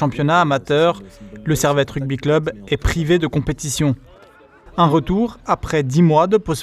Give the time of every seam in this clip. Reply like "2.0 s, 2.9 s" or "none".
4.7 s